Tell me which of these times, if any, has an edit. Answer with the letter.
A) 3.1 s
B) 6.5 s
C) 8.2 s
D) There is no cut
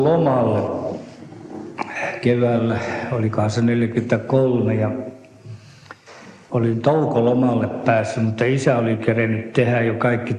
B